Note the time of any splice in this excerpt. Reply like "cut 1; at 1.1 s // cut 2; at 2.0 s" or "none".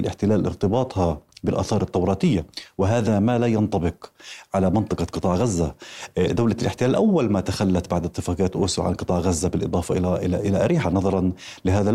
none